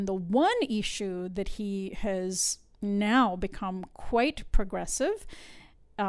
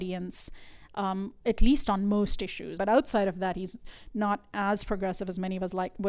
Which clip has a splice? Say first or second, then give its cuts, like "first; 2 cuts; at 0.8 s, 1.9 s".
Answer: second; 1 cut; at 2.8 s